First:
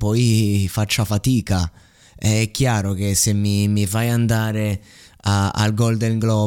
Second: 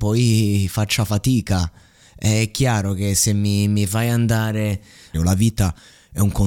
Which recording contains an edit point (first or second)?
second